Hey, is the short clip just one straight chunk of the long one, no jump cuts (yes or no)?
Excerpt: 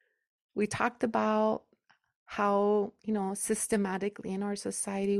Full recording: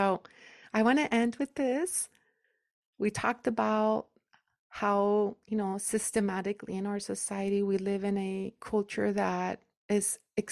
yes